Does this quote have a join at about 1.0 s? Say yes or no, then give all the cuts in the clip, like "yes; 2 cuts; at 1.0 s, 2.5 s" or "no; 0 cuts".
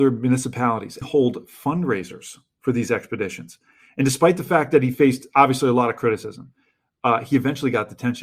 yes; 1 cut; at 1.0 s